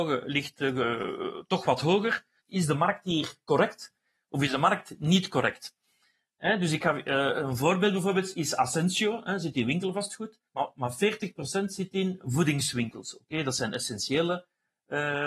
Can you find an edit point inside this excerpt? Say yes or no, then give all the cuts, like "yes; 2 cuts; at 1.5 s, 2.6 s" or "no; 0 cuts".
yes; 2 cuts; at 2.4 s, 10.5 s